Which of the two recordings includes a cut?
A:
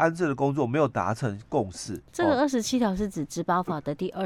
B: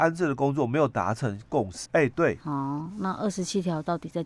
B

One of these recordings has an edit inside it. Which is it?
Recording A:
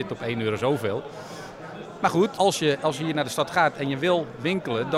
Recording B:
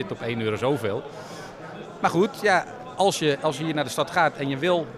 A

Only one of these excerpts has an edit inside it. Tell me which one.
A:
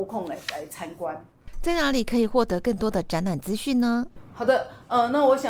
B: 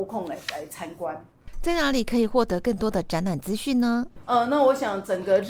B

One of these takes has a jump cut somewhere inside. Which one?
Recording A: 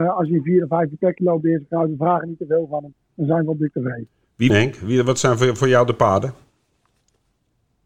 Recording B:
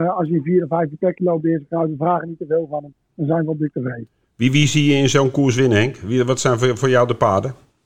A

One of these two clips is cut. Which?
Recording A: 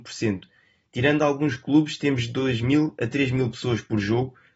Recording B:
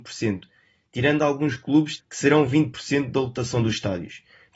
B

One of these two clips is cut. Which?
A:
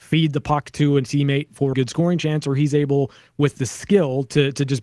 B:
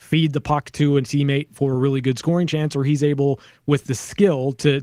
A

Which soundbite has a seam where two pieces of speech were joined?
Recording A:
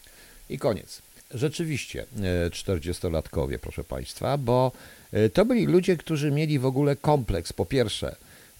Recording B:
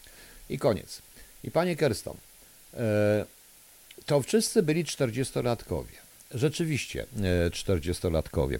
A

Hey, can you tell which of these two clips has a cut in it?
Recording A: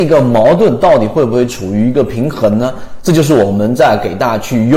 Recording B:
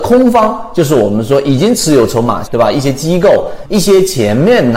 B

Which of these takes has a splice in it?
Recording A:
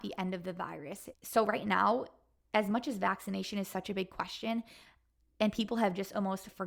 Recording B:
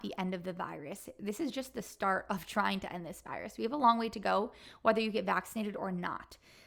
A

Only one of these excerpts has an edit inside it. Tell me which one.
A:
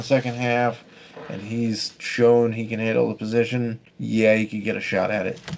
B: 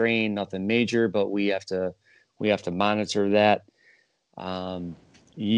A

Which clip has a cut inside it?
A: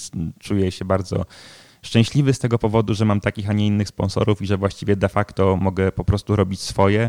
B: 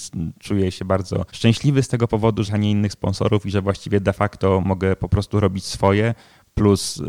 B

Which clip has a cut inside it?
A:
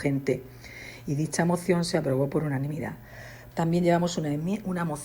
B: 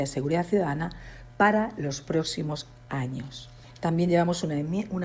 A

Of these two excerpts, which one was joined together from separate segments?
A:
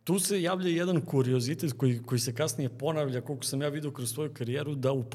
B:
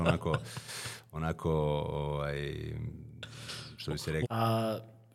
B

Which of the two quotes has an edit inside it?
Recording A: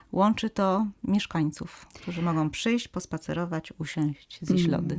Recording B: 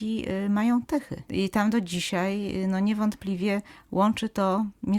B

